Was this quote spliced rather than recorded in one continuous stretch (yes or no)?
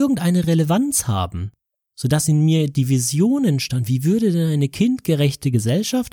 no